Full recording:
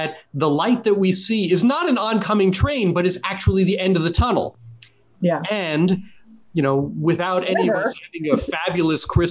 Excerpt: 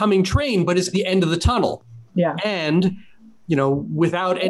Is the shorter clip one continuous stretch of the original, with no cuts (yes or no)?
no